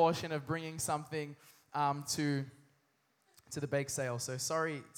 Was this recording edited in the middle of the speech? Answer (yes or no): no